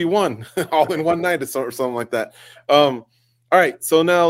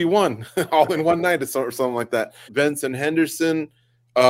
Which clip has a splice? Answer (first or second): second